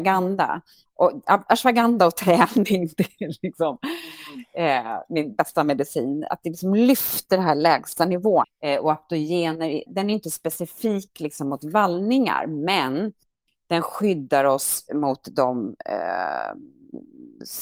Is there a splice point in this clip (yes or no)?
yes